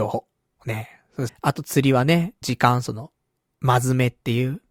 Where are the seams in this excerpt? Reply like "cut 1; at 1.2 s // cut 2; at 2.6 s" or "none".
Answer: cut 1; at 1.3 s // cut 2; at 2.4 s